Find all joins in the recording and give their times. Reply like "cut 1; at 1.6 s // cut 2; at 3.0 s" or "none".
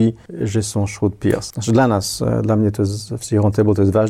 cut 1; at 1.5 s